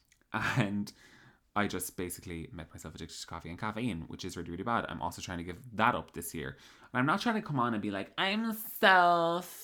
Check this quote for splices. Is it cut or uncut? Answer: uncut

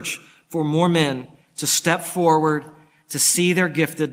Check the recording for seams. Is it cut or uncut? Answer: uncut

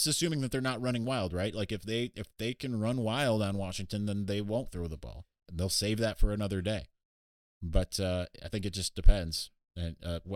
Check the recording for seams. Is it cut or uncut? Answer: uncut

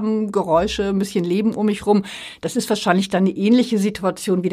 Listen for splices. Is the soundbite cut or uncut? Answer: uncut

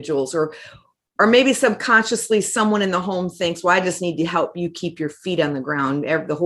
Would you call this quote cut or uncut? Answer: uncut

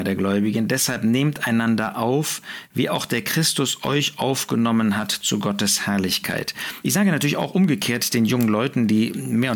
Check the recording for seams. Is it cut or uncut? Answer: cut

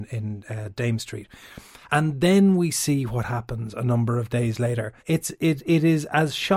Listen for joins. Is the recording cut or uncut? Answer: cut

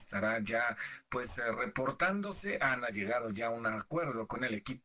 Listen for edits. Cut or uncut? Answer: uncut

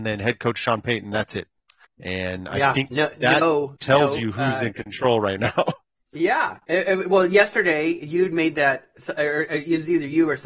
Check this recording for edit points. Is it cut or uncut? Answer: uncut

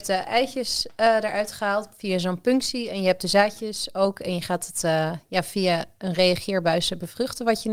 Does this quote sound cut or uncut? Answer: uncut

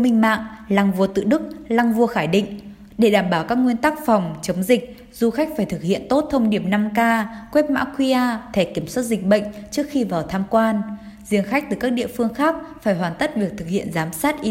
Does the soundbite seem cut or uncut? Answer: cut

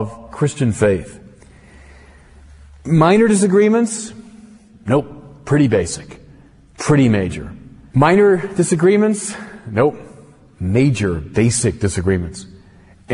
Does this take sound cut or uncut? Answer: cut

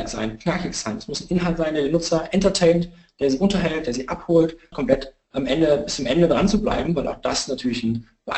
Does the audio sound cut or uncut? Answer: cut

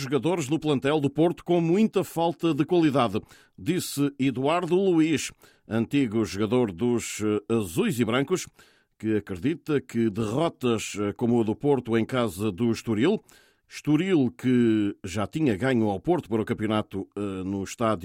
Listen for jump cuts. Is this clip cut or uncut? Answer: uncut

